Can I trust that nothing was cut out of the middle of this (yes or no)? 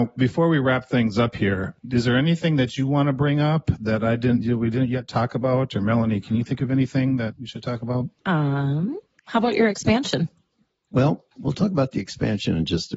no